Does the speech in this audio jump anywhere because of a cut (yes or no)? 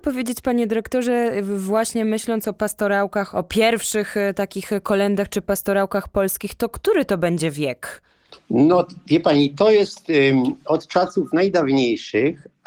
yes